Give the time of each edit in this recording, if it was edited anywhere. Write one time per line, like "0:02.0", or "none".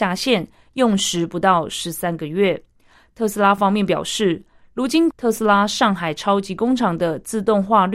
0:05.1